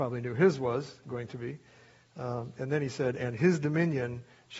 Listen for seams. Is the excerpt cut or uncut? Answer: uncut